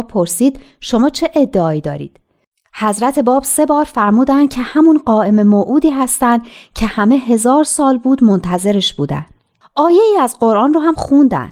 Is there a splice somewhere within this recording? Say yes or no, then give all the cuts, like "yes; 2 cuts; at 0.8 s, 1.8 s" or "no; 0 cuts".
yes; 1 cut; at 9.6 s